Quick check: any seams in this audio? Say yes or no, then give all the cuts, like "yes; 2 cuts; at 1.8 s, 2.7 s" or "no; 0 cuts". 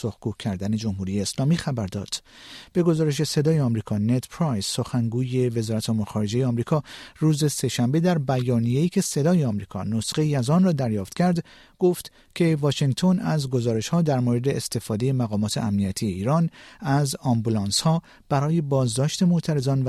no; 0 cuts